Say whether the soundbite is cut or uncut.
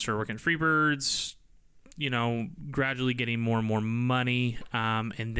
uncut